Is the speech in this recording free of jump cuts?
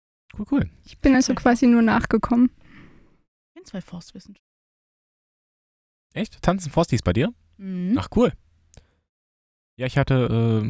yes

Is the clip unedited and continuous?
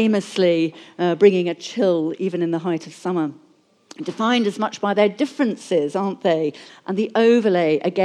no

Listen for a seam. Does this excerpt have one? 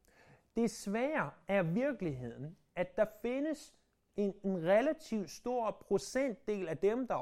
no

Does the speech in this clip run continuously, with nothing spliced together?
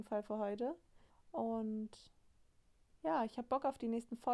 no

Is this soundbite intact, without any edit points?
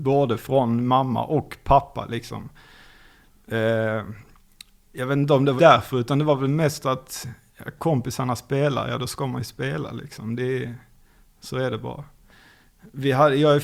no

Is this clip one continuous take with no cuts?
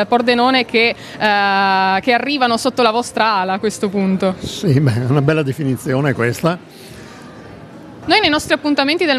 no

